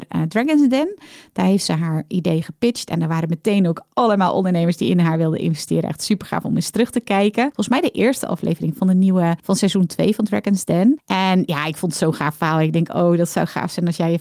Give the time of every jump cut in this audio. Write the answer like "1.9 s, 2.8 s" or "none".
none